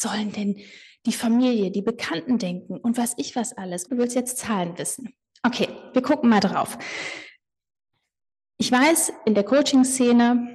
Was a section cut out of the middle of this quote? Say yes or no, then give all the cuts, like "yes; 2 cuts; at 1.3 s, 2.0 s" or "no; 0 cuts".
yes; 1 cut; at 3.9 s